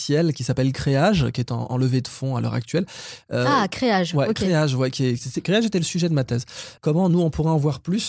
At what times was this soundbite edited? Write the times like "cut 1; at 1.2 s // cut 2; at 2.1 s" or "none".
cut 1; at 6.8 s

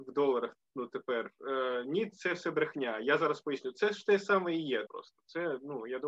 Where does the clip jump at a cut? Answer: cut 1; at 4.9 s

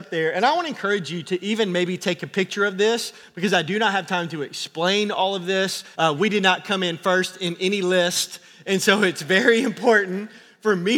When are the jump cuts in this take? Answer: cut 1; at 5.9 s

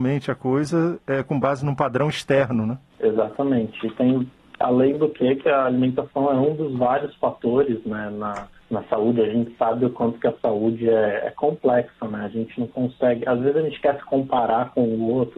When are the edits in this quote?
none

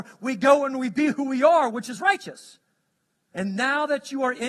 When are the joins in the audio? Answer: cut 1; at 3.3 s

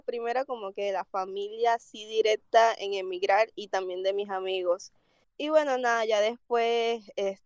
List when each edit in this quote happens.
cut 1; at 5.2 s

